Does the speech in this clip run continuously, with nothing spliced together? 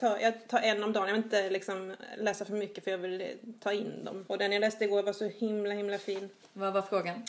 no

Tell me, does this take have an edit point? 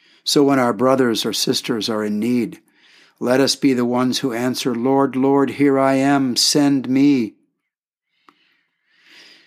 no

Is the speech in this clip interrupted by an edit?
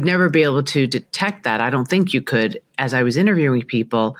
no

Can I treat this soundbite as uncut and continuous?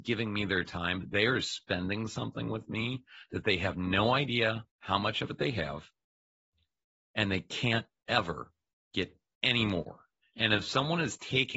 no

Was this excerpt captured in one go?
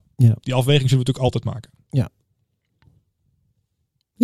yes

